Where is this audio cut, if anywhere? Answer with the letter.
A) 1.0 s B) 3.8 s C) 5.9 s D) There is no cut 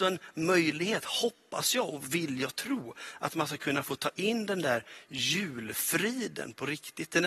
D